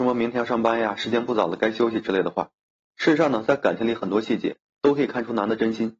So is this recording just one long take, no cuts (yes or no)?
no